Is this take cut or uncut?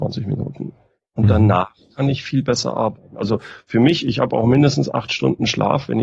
uncut